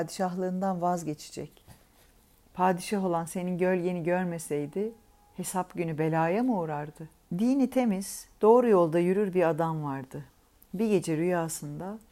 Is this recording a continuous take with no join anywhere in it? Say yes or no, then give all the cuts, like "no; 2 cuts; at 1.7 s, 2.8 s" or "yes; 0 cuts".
no; 1 cut; at 7.3 s